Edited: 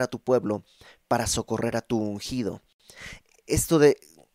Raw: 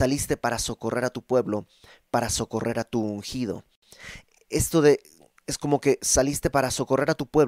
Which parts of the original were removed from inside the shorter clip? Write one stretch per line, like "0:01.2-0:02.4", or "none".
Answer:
none

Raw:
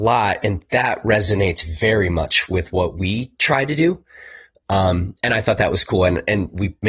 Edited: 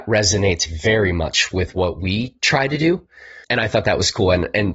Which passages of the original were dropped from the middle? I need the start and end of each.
0:04.4-0:05.2

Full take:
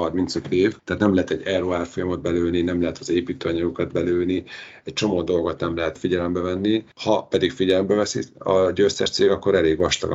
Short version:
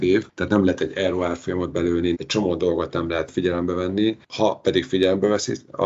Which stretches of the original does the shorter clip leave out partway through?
0:02.6-0:04.8

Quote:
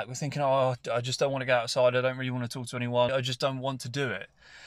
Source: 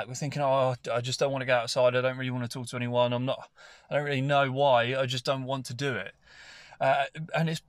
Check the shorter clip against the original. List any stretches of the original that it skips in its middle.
0:03.1-0:04.9

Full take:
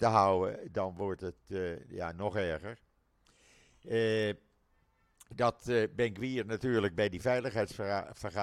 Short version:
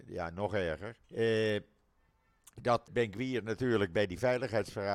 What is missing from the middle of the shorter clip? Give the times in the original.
0:02.9-0:03.8
0:05.6-0:05.9

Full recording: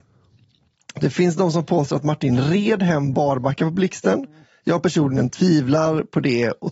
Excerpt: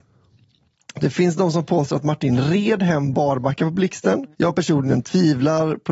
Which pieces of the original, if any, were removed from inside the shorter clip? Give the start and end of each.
0:04.3-0:04.6

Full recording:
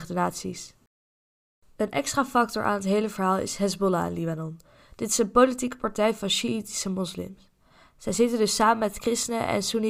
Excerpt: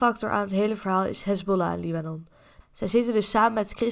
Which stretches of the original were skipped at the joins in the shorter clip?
0:04.9-0:07.8

